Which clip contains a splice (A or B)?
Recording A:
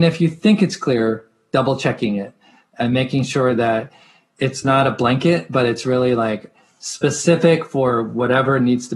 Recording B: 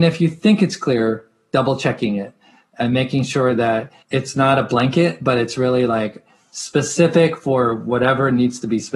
B